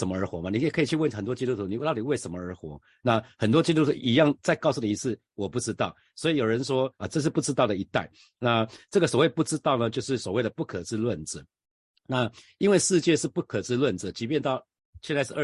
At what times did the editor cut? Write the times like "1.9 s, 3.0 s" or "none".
7.0 s